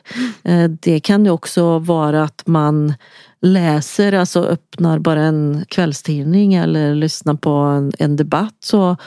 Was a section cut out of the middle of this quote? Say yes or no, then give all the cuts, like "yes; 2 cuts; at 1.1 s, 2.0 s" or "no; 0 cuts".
no; 0 cuts